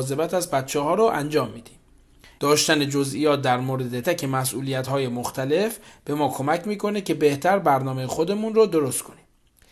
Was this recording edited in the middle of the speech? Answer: yes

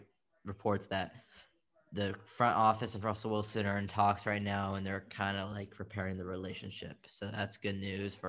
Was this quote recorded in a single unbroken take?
yes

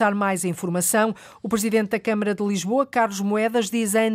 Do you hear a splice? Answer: no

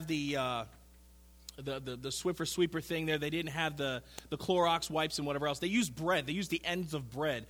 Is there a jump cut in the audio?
no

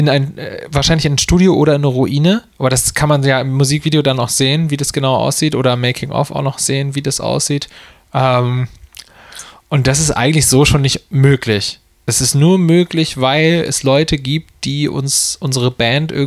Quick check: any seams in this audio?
yes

